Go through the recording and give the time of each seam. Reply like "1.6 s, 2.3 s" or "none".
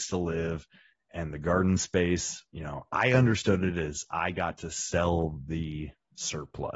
2.9 s